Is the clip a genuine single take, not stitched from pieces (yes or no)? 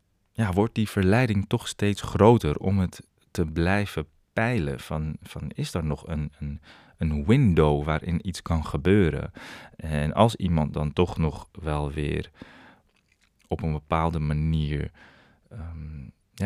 yes